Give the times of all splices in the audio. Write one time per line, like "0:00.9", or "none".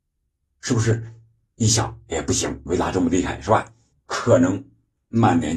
0:03.9